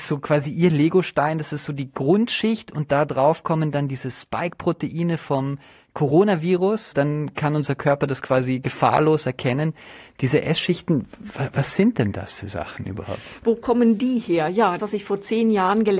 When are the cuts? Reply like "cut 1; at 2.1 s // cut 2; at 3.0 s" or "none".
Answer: cut 1; at 6.9 s // cut 2; at 14.8 s